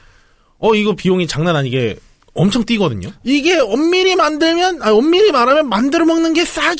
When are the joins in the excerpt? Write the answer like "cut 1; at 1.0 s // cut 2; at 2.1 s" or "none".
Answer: cut 1; at 3.2 s